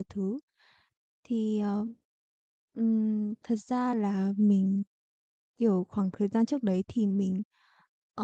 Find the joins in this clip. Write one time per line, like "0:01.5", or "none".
none